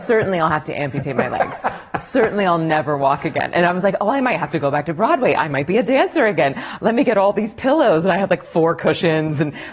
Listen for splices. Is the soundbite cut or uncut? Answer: uncut